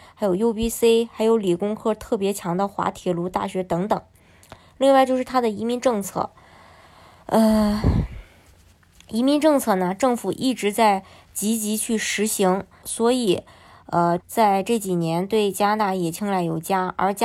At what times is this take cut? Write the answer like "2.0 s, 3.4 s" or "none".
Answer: 12.8 s, 14.2 s